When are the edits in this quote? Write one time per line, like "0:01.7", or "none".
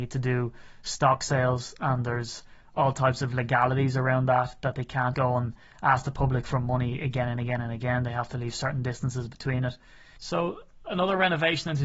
0:05.1